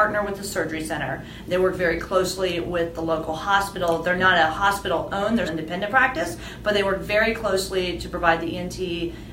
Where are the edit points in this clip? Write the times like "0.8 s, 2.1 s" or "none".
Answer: 5.5 s